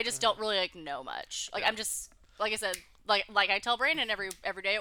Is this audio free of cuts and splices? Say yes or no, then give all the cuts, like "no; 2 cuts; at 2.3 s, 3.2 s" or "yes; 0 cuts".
yes; 0 cuts